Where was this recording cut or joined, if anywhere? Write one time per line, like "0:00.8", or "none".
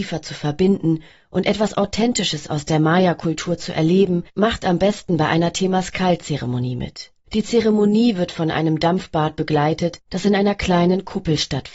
0:07.3